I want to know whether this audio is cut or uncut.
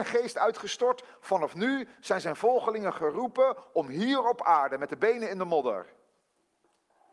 uncut